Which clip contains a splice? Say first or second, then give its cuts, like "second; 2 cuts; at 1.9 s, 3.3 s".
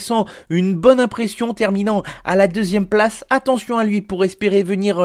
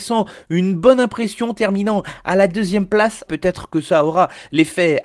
second; 1 cut; at 3.3 s